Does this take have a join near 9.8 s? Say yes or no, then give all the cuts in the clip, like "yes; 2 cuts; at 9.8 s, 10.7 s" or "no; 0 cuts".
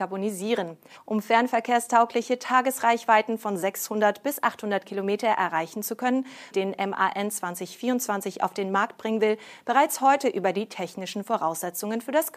no; 2 cuts; at 0.9 s, 6.5 s